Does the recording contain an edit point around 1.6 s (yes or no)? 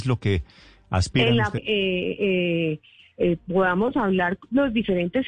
yes